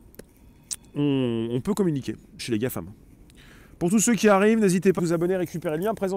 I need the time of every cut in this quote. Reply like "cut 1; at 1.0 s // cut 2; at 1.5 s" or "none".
cut 1; at 2.4 s // cut 2; at 5.0 s